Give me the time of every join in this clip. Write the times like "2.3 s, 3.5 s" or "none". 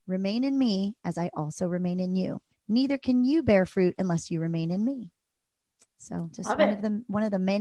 2.5 s